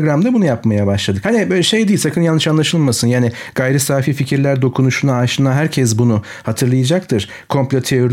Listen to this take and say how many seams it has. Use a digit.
1